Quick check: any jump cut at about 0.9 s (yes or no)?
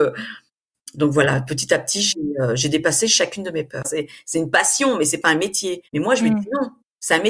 no